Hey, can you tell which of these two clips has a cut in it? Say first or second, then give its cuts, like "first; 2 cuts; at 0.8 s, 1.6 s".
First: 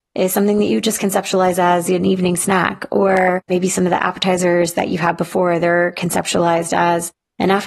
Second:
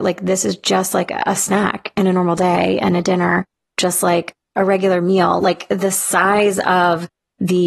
second; 1 cut; at 5.4 s